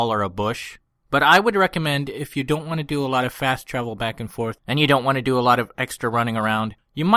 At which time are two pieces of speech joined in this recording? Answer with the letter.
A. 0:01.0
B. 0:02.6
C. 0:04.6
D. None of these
A